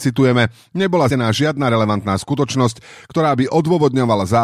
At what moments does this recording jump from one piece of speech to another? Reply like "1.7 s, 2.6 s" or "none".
1.1 s